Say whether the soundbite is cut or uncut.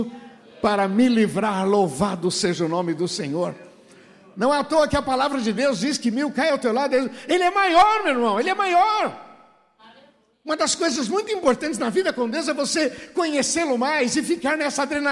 uncut